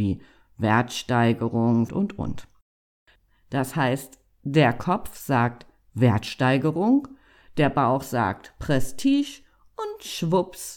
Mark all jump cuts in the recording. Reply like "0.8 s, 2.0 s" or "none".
1.9 s

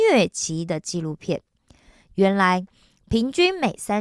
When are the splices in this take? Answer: none

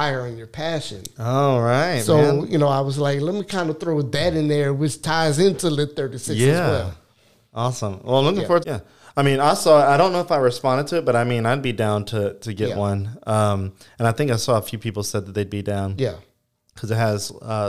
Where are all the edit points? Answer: 8.6 s

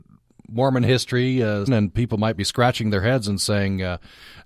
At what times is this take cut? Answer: 1.7 s

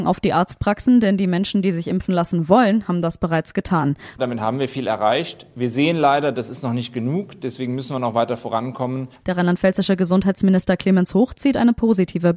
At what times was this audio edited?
4.2 s, 9.2 s

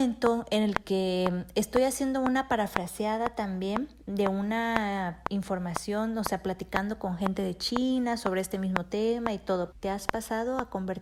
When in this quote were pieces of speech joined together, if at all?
9.7 s

